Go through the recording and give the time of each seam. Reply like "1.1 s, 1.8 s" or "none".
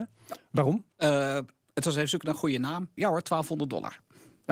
0.9 s, 3.0 s